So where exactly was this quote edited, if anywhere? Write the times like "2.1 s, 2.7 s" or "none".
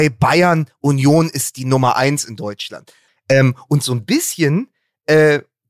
3.1 s